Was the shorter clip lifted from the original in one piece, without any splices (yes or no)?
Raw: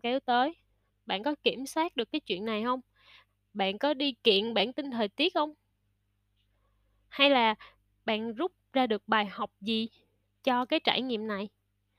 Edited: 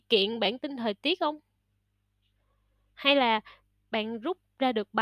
yes